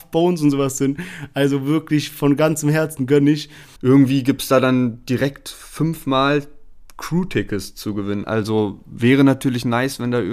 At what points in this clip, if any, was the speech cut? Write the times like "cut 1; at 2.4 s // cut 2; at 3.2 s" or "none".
cut 1; at 3.8 s // cut 2; at 8.2 s